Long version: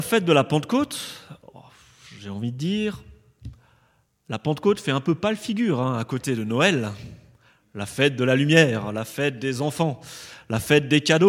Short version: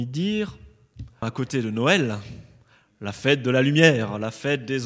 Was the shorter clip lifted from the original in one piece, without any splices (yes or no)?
no